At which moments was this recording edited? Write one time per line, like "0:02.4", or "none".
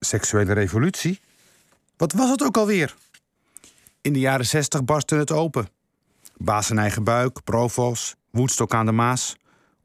none